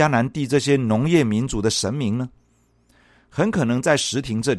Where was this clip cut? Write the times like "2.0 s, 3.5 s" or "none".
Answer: none